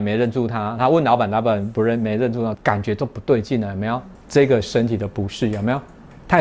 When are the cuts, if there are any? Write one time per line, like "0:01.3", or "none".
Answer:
0:02.5
0:04.2